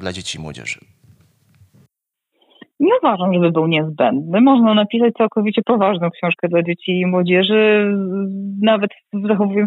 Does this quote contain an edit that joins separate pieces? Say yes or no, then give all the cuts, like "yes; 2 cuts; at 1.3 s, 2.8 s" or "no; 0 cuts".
no; 0 cuts